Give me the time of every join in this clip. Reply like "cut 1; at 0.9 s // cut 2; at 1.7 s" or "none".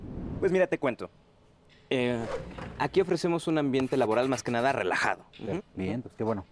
cut 1; at 5.6 s

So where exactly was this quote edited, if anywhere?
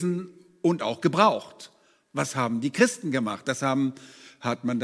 none

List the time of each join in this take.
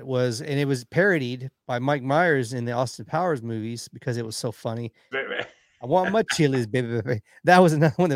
cut 1; at 5.1 s

